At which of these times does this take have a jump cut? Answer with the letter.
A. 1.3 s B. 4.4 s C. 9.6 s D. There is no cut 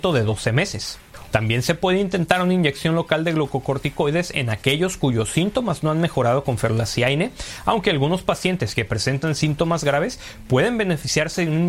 A